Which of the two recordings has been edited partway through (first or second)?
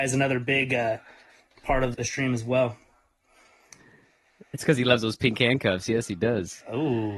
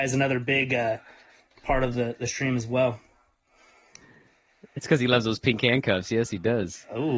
first